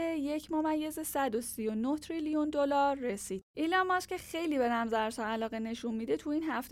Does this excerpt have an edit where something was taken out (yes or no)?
yes